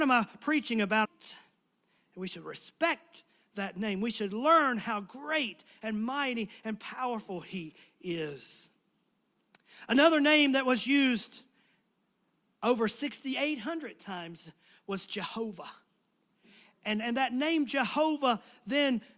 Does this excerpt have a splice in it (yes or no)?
yes